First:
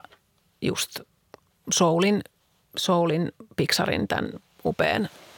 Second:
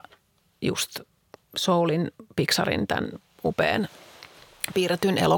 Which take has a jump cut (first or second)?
second